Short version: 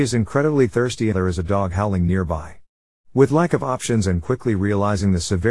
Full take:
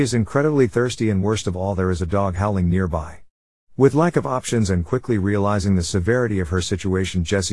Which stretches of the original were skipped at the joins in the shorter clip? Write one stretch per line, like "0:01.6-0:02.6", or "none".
0:01.1-0:01.8